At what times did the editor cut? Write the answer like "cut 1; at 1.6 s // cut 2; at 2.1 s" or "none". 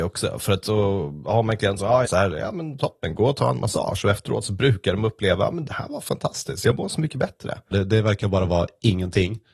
cut 1; at 2.0 s // cut 2; at 7.7 s